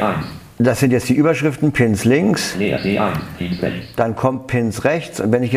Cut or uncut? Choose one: uncut